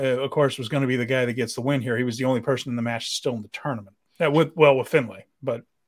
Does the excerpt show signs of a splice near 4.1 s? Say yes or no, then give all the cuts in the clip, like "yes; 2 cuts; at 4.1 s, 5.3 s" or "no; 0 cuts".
yes; 1 cut; at 4.1 s